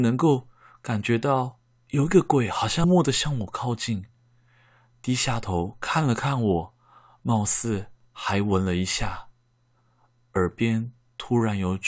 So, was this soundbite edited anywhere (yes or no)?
yes